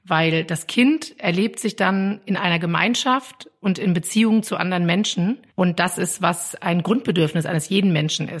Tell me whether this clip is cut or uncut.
uncut